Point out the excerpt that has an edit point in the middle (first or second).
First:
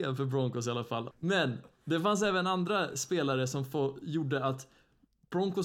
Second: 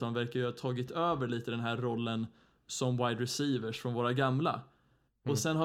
first